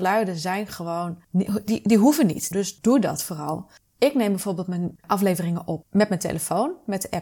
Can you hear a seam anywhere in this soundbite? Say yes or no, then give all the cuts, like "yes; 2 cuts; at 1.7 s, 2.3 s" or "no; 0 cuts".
yes; 1 cut; at 2.5 s